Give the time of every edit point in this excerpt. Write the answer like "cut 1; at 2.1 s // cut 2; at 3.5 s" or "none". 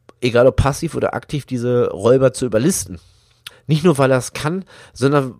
cut 1; at 3.5 s